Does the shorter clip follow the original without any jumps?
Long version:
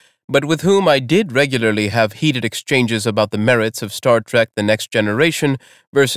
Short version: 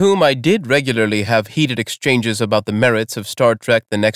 yes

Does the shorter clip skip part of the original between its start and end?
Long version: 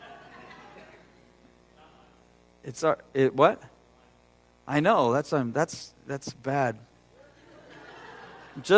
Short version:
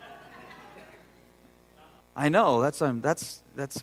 yes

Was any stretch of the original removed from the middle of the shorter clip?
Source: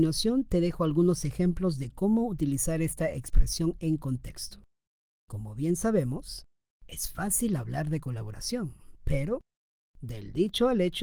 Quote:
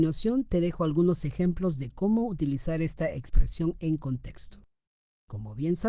no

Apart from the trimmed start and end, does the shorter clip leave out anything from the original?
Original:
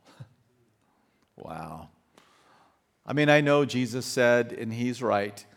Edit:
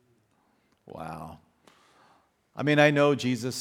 no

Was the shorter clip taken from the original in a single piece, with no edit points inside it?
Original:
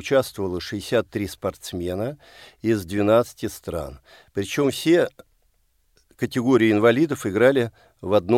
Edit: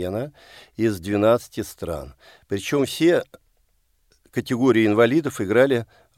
yes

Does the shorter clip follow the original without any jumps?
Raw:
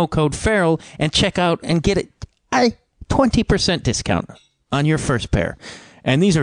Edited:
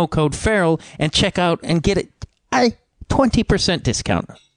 yes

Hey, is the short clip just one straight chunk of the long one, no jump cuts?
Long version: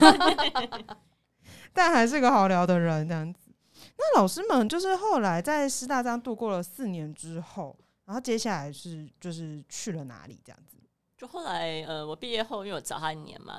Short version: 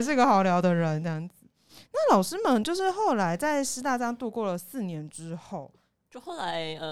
no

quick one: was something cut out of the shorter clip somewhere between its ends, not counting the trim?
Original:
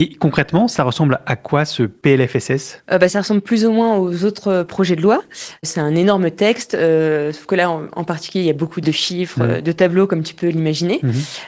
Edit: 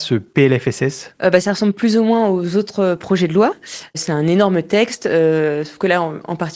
no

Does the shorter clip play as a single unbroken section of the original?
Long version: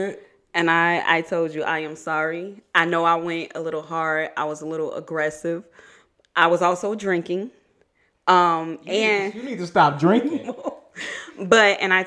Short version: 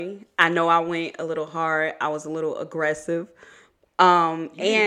no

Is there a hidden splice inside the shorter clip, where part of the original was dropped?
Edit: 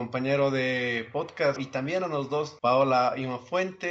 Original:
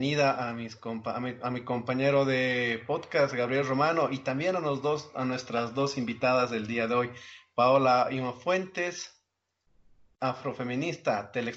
yes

